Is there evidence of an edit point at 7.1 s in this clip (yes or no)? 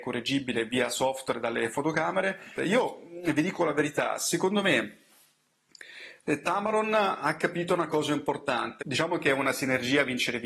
no